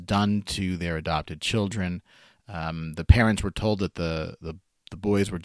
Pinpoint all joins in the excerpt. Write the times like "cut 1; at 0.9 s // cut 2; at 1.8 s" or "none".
none